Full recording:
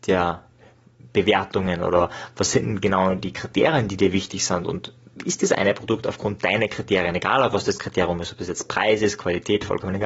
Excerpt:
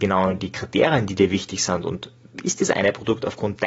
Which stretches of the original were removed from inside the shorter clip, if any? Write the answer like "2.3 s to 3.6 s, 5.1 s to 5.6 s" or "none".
none